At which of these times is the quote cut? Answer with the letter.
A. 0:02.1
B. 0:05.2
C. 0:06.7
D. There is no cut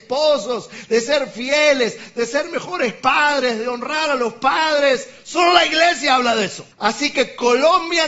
C